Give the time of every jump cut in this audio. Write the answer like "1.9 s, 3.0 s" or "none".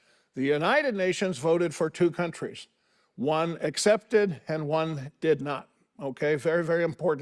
none